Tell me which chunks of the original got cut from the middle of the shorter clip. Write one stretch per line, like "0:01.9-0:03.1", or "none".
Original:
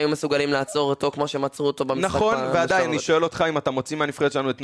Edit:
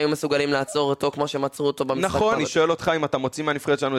0:02.4-0:02.9